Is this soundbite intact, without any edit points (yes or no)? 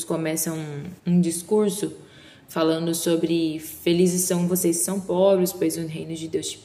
no